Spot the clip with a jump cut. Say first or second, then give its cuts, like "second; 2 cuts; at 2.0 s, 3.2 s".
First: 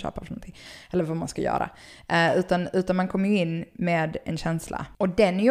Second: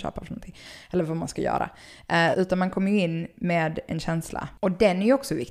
second; 1 cut; at 2.3 s